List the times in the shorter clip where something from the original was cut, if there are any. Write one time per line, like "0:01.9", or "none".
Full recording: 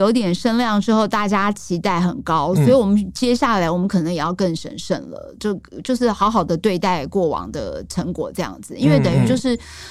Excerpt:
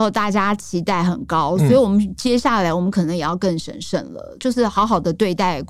0:04.4